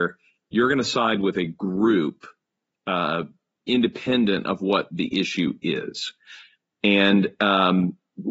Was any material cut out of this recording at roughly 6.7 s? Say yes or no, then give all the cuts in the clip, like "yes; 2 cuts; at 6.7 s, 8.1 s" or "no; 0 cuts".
no; 0 cuts